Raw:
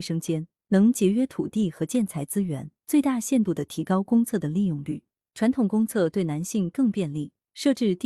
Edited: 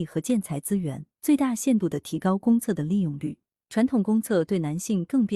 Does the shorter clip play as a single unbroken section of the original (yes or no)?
yes